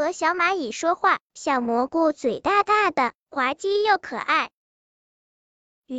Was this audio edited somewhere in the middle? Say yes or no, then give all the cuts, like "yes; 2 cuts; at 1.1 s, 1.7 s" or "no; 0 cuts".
no; 0 cuts